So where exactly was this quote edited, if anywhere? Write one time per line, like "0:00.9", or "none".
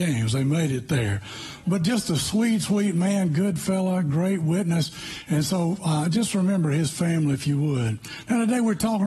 none